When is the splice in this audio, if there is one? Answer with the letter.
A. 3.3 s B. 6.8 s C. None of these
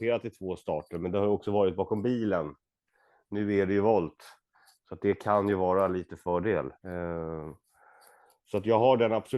B